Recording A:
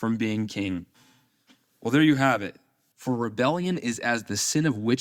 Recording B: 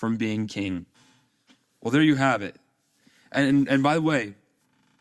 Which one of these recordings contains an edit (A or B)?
A